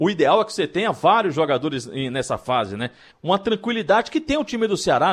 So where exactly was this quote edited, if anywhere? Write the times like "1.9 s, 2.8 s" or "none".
3.1 s